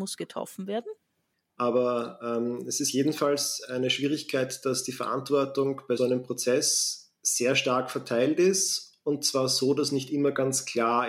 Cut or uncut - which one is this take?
cut